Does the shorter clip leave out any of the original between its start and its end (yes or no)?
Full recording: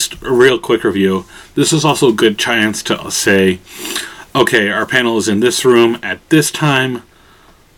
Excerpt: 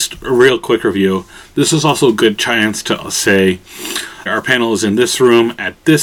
yes